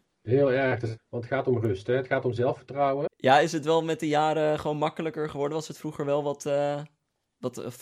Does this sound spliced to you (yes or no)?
yes